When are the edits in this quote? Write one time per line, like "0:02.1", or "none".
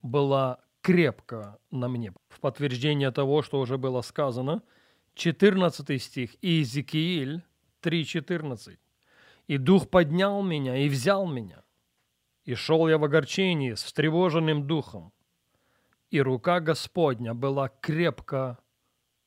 0:02.1

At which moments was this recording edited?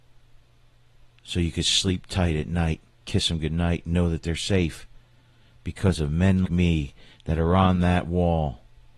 0:03.0
0:06.4

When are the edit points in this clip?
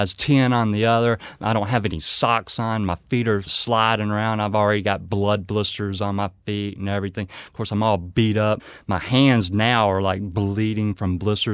none

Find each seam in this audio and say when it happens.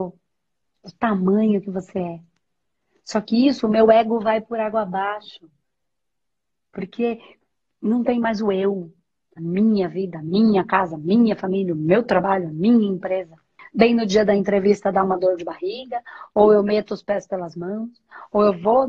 0:13.6

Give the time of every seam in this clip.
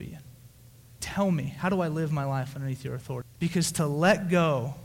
0:01.0
0:03.2

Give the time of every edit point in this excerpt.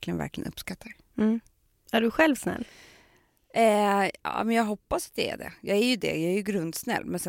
none

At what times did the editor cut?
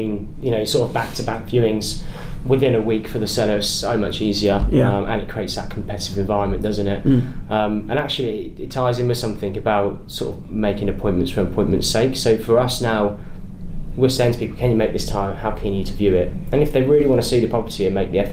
none

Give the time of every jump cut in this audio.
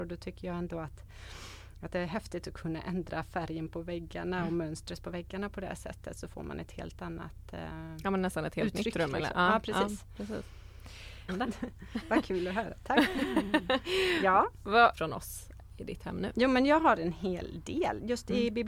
0:11.3
0:14.9

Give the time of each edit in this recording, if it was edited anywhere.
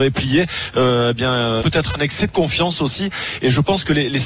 0:01.6

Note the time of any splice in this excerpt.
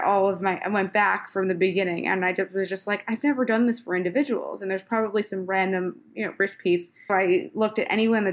0:07.1

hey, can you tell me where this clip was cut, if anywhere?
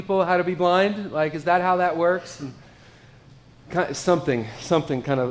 none

